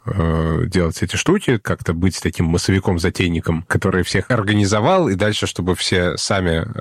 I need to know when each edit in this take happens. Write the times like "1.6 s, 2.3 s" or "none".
none